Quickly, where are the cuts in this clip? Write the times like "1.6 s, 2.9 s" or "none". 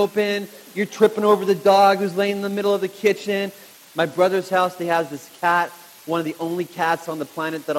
3.8 s